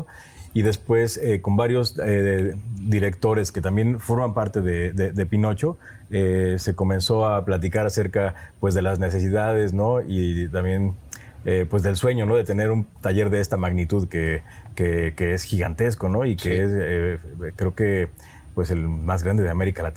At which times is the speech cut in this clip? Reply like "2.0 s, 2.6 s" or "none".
none